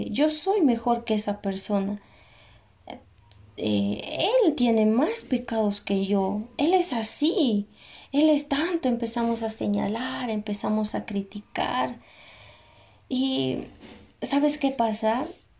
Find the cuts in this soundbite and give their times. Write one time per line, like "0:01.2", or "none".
none